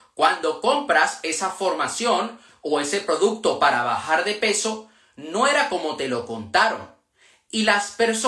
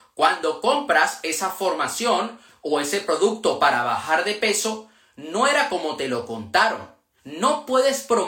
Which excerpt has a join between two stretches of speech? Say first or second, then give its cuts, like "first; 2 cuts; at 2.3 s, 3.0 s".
second; 1 cut; at 7.2 s